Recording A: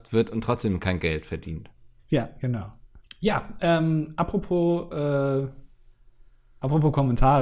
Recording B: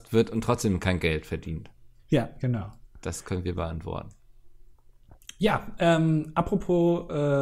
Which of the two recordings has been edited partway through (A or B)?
A